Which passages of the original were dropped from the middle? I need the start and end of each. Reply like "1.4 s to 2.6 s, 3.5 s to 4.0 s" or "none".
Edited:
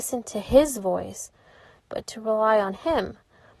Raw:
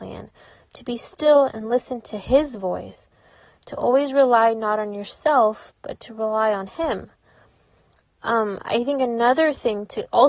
3.6 s to 5.7 s